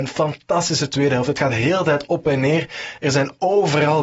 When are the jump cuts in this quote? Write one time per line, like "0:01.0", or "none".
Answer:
none